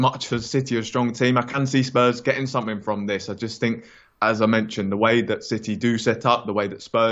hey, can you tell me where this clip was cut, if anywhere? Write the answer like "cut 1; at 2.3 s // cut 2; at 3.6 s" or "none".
none

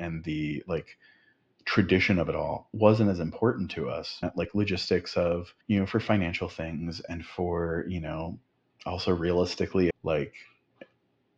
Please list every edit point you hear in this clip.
cut 1; at 4.2 s // cut 2; at 5.6 s // cut 3; at 9.9 s

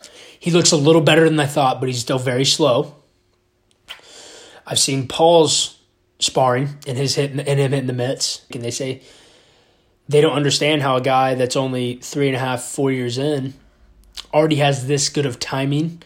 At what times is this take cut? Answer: cut 1; at 8.5 s

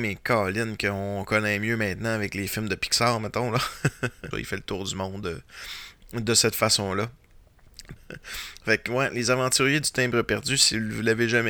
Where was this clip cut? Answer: cut 1; at 4.3 s // cut 2; at 8.0 s

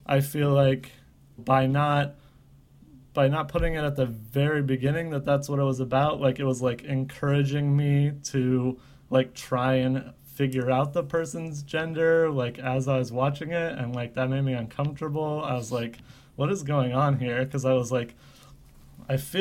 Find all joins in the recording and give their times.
cut 1; at 1.4 s

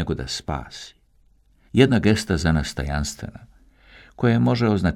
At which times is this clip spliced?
cut 1; at 1.7 s

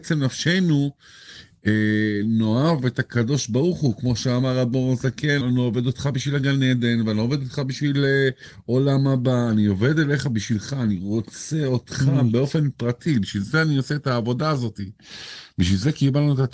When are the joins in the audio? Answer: cut 1; at 5.4 s

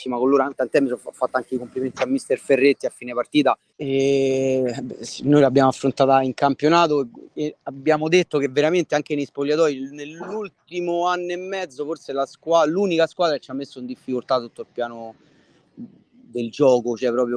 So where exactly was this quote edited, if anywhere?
cut 1; at 3.7 s

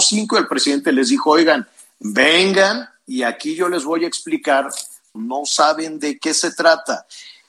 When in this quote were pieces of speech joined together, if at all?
cut 1; at 5.2 s

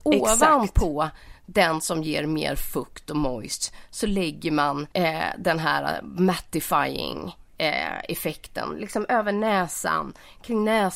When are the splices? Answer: cut 1; at 4.9 s

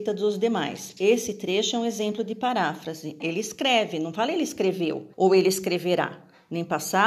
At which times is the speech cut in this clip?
cut 1; at 3.2 s // cut 2; at 5.1 s

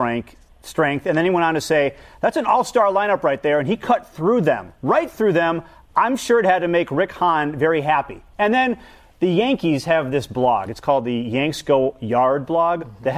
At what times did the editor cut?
none

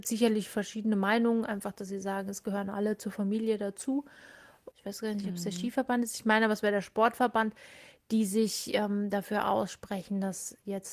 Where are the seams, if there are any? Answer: cut 1; at 4.7 s

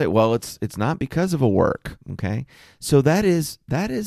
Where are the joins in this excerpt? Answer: cut 1; at 2.0 s

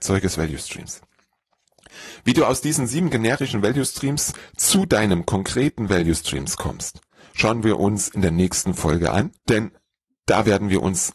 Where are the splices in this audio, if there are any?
cut 1; at 9.4 s

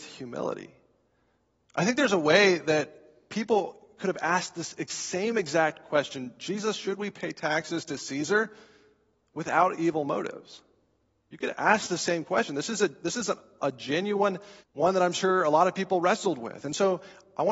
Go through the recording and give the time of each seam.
cut 1; at 14.6 s

